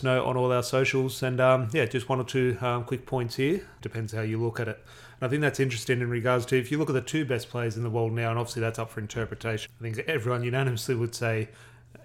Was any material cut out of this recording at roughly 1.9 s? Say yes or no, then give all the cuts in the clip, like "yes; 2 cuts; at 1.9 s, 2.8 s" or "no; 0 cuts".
no; 2 cuts; at 3.8 s, 9.7 s